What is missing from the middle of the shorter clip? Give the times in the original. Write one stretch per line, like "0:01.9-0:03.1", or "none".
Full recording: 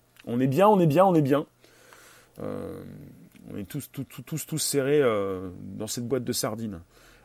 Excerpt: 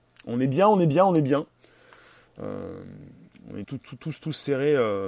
0:03.6-0:03.9